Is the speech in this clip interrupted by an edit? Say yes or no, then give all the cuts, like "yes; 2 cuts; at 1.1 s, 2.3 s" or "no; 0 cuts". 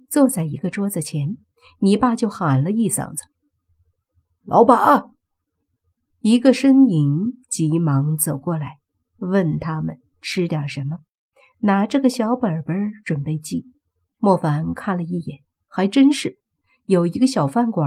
yes; 1 cut; at 14.1 s